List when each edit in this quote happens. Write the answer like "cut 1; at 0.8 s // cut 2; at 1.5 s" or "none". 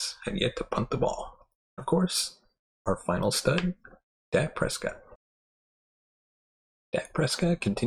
cut 1; at 1.7 s